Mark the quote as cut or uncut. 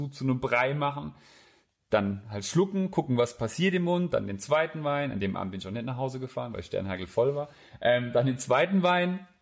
uncut